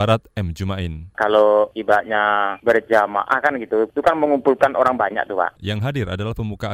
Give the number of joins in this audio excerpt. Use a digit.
1